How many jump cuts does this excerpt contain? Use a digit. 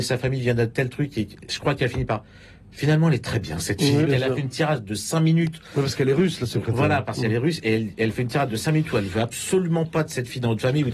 1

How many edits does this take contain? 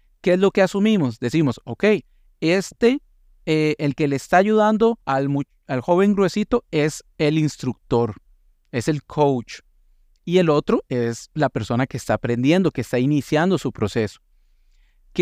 1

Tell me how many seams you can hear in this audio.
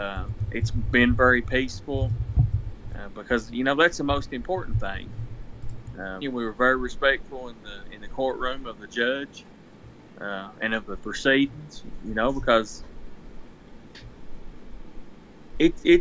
1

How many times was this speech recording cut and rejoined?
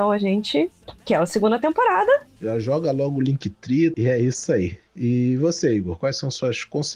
2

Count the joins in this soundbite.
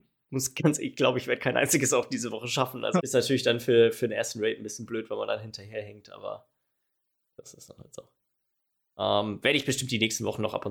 1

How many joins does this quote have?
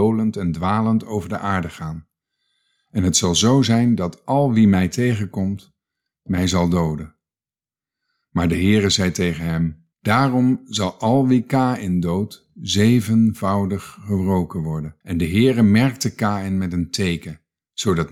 2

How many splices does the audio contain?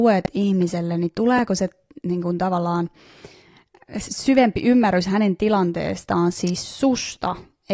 0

